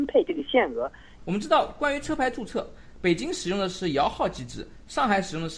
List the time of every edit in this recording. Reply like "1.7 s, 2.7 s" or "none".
1.2 s